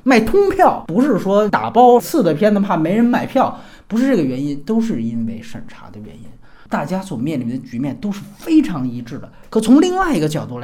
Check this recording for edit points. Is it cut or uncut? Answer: uncut